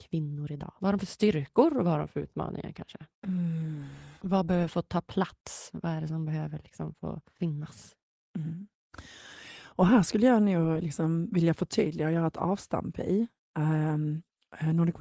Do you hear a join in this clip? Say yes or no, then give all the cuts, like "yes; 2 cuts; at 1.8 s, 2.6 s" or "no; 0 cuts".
no; 0 cuts